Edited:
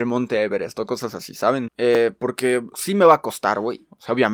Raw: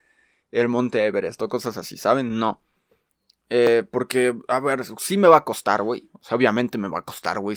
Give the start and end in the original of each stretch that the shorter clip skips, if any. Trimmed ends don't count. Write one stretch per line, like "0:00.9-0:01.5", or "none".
0:02.3-0:03.4
0:04.4-0:05.0